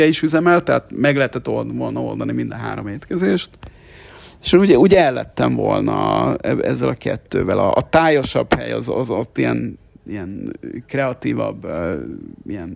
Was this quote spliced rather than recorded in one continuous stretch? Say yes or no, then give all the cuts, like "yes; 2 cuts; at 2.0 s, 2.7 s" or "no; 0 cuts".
no; 0 cuts